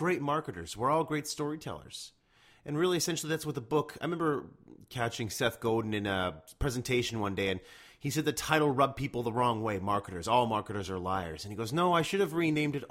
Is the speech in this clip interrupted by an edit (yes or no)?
no